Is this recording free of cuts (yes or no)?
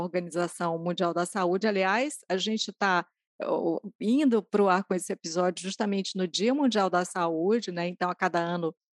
yes